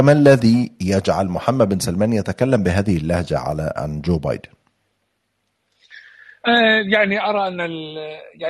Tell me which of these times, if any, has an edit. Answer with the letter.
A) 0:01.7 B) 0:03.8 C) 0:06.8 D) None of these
B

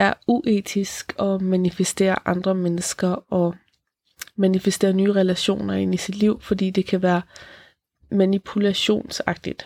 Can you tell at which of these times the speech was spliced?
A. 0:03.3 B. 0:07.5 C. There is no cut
C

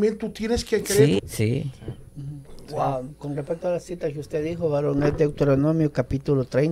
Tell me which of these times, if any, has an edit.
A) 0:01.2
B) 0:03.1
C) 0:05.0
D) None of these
A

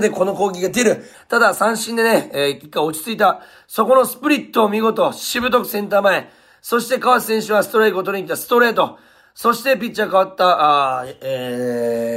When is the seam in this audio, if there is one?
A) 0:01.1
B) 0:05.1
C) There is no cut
A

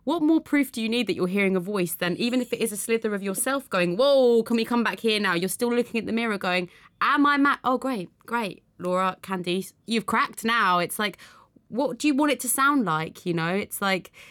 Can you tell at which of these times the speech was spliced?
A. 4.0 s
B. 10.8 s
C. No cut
C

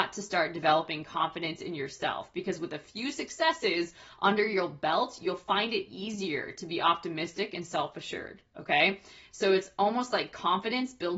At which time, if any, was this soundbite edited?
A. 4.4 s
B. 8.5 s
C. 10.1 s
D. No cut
D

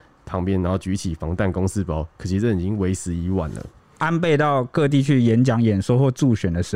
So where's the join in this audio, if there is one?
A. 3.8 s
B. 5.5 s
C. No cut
A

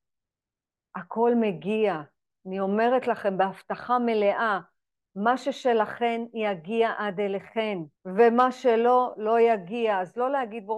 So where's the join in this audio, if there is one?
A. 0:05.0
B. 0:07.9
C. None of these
B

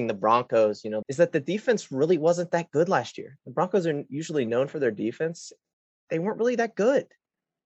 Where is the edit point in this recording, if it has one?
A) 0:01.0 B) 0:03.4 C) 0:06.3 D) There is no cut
A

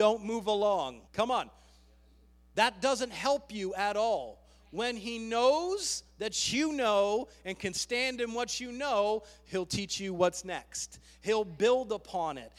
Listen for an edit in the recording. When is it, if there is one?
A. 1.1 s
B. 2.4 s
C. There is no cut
A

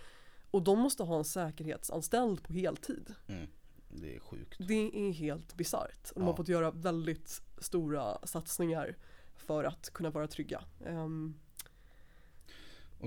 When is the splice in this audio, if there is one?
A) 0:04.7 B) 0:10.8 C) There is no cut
C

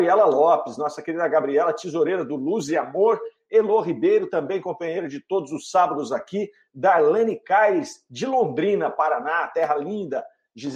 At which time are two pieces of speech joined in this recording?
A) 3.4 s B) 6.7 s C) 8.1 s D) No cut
D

